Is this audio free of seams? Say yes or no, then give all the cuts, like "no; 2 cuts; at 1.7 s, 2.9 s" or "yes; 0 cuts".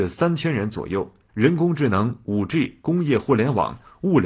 no; 1 cut; at 1.3 s